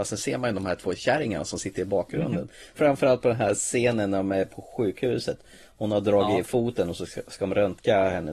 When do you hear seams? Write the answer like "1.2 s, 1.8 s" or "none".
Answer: 2.8 s